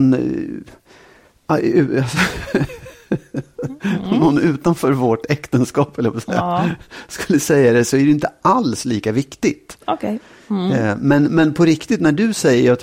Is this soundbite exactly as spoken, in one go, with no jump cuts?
yes; 0 cuts

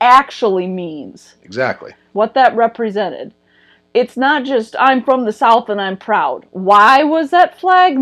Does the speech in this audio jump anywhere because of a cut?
yes; 1 cut; at 2.1 s

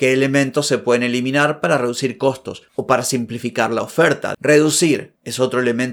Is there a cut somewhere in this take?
yes; 1 cut; at 4.3 s

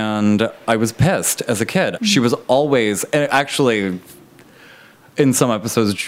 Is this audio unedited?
no; 1 cut; at 2.0 s

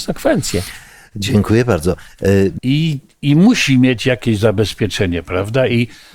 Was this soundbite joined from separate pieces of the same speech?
yes; 1 cut; at 2.6 s

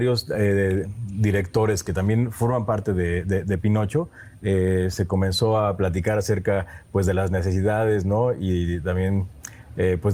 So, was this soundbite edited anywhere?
no; 0 cuts

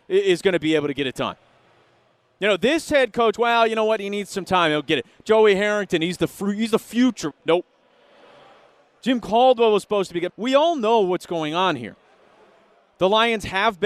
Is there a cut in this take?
yes; 2 cuts; at 7.3 s, 10.3 s

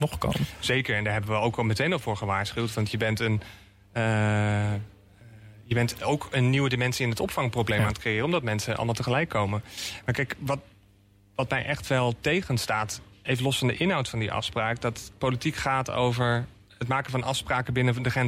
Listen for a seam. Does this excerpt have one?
no; 0 cuts

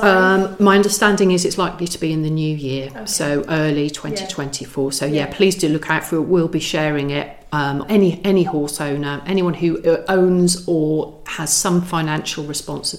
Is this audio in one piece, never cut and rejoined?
no; 1 cut; at 7.8 s

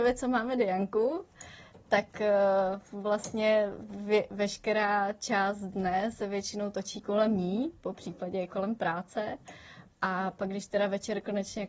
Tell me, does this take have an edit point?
no; 0 cuts

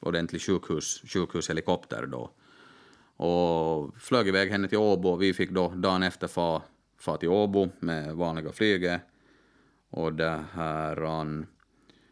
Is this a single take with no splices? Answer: yes; 0 cuts

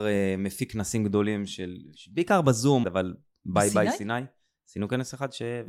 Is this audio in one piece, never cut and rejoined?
no; 1 cut; at 2.8 s

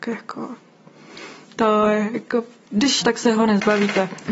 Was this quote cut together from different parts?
yes; 1 cut; at 3.0 s

